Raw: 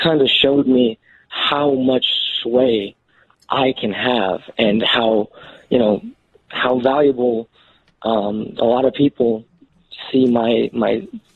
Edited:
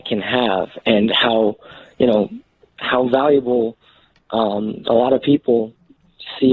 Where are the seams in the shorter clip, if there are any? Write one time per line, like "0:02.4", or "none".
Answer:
none